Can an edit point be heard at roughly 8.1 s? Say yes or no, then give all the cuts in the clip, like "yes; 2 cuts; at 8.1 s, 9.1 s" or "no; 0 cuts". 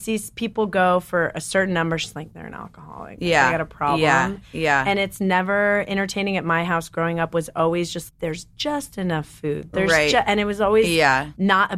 yes; 1 cut; at 8.1 s